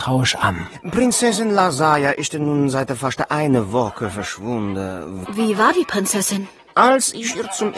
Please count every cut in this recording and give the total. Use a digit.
1